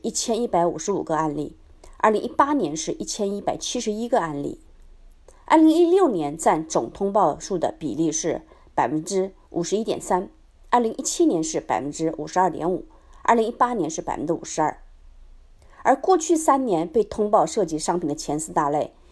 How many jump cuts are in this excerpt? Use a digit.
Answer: 0